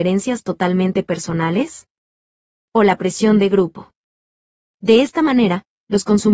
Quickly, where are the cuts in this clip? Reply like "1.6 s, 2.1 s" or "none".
none